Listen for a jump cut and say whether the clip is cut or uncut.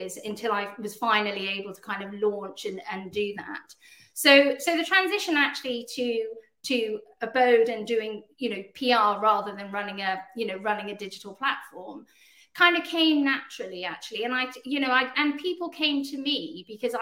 cut